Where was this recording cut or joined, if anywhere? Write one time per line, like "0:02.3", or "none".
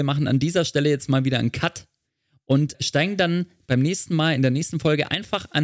none